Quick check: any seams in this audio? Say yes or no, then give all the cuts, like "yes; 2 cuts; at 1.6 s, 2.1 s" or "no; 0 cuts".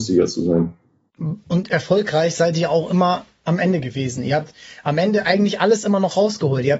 no; 0 cuts